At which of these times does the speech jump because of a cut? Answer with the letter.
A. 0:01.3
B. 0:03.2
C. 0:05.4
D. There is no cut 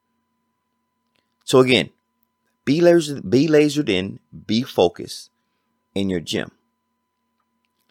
D